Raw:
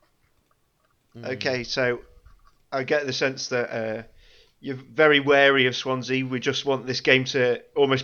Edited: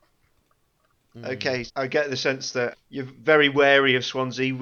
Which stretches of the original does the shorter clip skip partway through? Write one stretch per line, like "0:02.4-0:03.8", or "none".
0:01.7-0:02.6
0:03.7-0:04.4